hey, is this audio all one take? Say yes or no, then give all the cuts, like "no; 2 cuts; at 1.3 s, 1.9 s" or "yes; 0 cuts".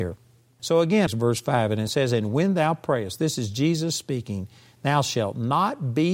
no; 1 cut; at 1.1 s